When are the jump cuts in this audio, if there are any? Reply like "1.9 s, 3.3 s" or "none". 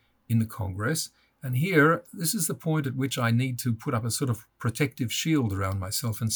none